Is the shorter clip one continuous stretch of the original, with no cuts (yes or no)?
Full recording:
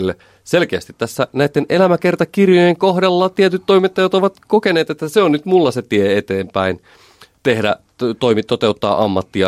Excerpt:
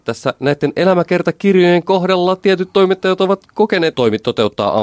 no